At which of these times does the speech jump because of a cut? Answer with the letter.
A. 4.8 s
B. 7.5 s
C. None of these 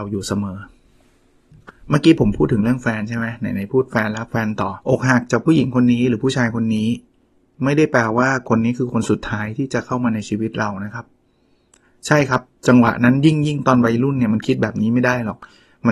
A